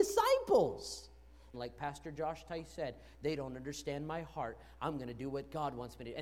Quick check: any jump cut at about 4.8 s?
no; 1 cut; at 1.5 s

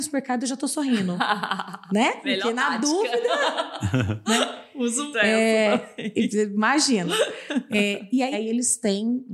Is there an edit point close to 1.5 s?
no; 2 cuts; at 5.1 s, 8.3 s

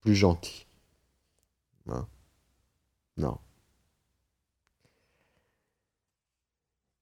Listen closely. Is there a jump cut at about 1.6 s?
no; 0 cuts

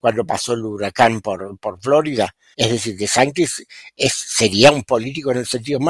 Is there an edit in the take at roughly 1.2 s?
no; 1 cut; at 2.5 s

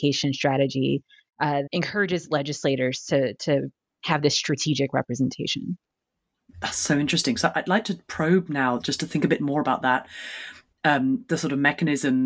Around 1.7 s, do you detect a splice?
yes; 1 cut; at 1.7 s

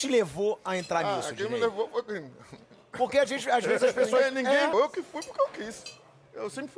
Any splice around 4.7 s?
yes; 1 cut; at 4.7 s

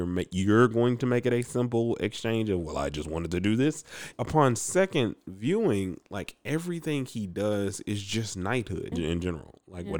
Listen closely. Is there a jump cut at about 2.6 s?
no; 2 cuts; at 4.1 s, 8.9 s

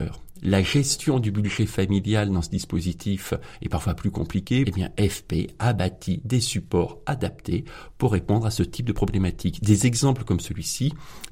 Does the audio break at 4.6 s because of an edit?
yes; 1 cut; at 4.6 s

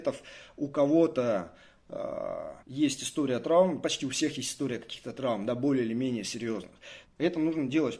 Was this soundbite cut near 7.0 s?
yes; 2 cuts; at 2.6 s, 7.0 s

